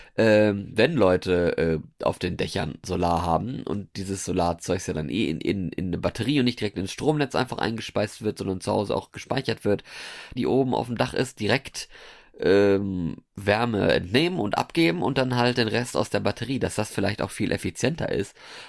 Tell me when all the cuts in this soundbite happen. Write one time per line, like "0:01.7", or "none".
0:10.4